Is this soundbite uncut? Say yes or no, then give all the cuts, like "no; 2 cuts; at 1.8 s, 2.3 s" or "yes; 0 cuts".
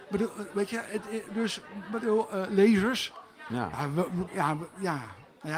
no; 1 cut; at 4.3 s